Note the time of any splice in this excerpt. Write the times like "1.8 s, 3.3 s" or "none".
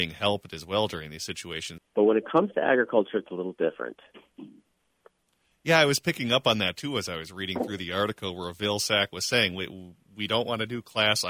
1.8 s